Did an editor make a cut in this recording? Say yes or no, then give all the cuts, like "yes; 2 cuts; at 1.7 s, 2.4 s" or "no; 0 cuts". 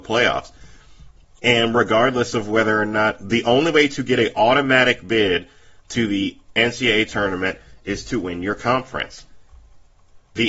yes; 1 cut; at 1.3 s